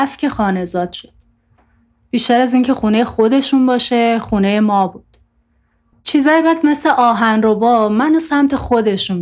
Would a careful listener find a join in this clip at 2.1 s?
no; 1 cut; at 5.9 s

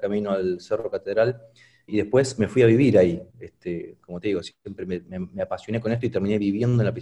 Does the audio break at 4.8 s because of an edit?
no; 1 cut; at 1.9 s

